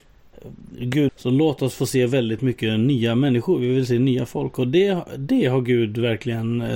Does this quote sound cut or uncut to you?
cut